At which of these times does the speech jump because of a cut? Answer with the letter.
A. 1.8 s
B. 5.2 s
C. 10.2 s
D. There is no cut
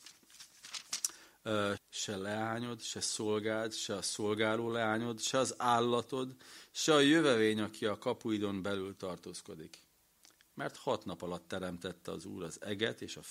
A